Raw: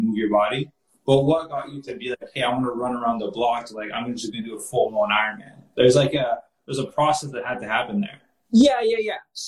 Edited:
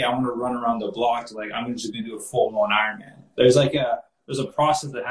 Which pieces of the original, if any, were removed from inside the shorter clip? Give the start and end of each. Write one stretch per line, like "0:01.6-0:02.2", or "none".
none